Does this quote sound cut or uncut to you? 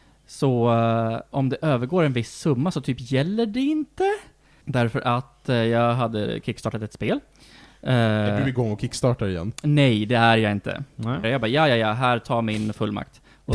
cut